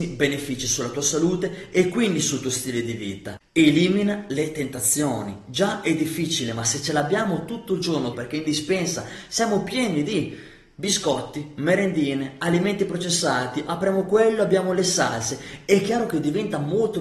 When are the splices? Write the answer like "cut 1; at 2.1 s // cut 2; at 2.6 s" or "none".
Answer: cut 1; at 8.1 s // cut 2; at 13.7 s

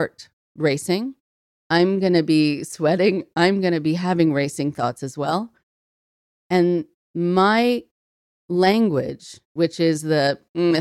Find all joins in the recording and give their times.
none

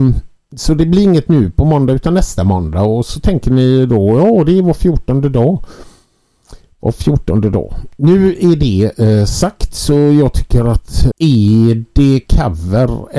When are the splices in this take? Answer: cut 1; at 11.1 s

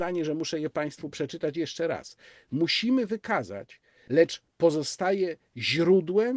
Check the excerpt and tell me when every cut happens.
cut 1; at 4.1 s

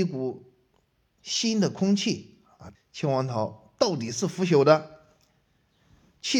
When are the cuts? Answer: cut 1; at 2.7 s

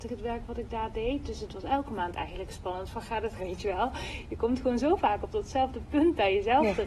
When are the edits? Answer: cut 1; at 3.4 s

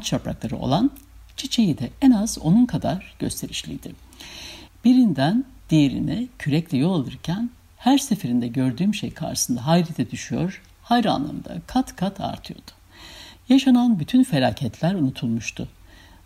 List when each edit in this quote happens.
cut 1; at 4.7 s // cut 2; at 13.3 s

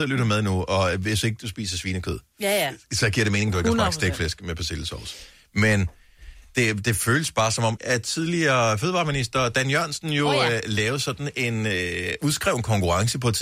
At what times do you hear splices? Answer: cut 1; at 7.8 s

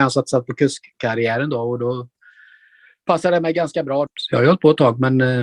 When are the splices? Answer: cut 1; at 4.1 s

